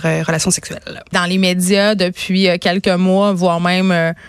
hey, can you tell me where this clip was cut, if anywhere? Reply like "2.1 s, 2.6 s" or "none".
1.1 s